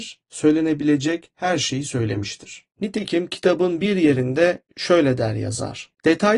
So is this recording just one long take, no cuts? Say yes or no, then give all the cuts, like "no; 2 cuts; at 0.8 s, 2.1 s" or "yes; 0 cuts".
yes; 0 cuts